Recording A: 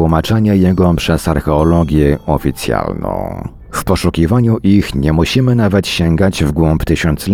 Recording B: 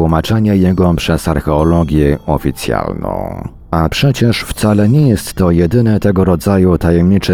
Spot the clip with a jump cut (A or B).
A